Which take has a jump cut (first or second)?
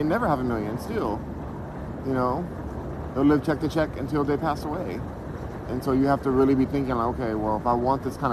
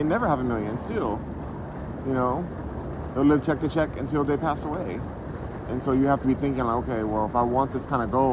second